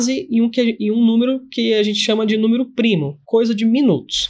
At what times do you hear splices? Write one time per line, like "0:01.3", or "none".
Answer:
0:03.2

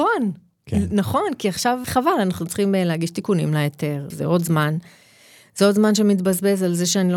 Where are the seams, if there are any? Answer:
0:01.8
0:04.1

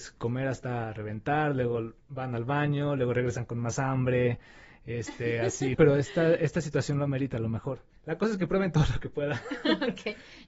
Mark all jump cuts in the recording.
0:05.7

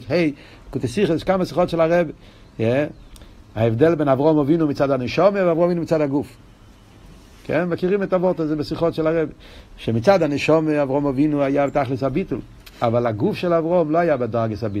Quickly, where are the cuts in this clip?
none

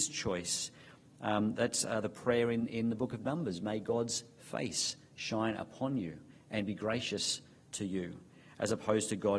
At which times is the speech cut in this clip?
none

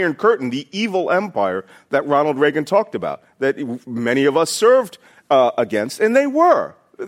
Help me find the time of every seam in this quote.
none

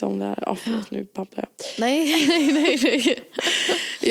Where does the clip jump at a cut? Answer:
none

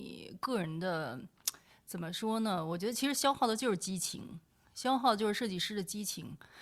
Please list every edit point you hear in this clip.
none

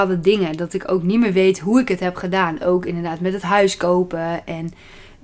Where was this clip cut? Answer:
none

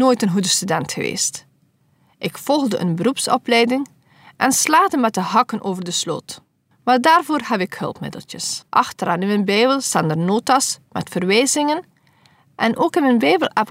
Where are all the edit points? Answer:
0:06.7
0:08.7

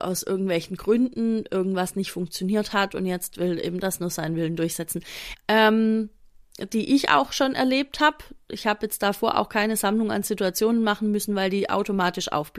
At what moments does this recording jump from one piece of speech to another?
0:05.3

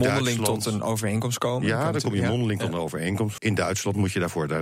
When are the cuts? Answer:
0:03.4

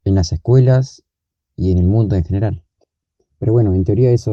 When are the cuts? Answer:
none

